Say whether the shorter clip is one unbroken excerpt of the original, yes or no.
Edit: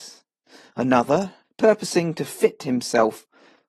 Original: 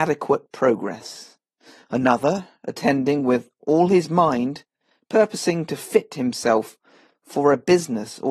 no